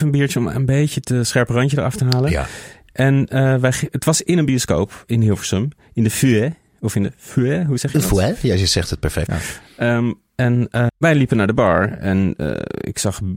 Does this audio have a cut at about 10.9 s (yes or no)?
yes